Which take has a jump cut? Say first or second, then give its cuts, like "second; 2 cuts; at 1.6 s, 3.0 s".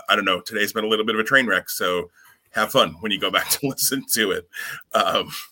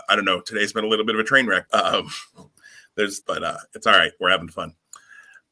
second; 2 cuts; at 1.7 s, 3.2 s